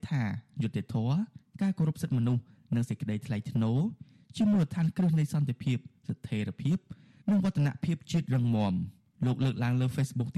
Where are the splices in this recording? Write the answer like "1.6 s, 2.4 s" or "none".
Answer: none